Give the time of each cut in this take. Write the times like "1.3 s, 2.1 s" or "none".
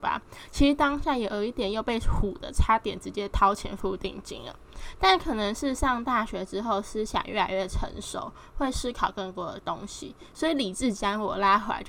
none